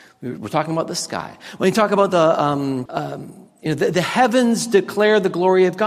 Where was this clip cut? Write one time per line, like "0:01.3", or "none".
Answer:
0:02.9